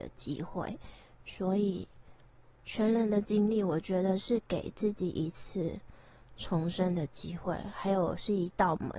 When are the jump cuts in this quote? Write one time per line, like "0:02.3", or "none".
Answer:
none